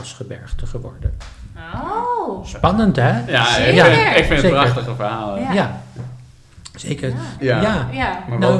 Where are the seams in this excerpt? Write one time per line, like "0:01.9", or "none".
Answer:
0:07.4